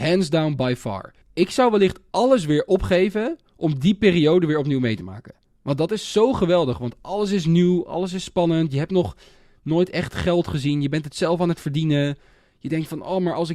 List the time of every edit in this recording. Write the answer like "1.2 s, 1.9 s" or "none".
1.2 s